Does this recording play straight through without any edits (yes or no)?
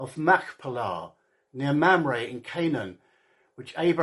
yes